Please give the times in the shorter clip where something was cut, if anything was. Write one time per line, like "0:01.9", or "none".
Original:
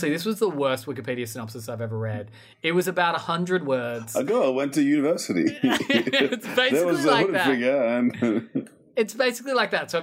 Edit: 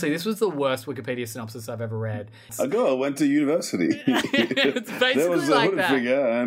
0:02.5